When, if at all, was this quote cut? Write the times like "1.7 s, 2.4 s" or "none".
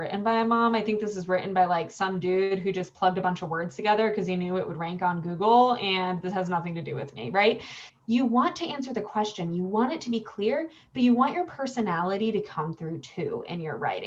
7.9 s